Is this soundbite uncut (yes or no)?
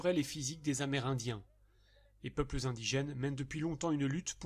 yes